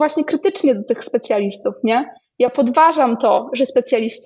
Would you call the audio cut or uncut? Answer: uncut